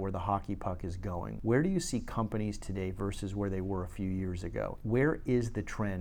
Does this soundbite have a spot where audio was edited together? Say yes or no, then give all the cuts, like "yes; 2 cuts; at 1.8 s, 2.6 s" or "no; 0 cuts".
no; 0 cuts